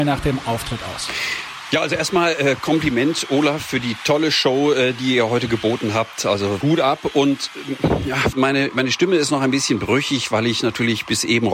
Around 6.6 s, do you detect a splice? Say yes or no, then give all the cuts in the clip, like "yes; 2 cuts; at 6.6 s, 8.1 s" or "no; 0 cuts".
yes; 2 cuts; at 6.6 s, 8.3 s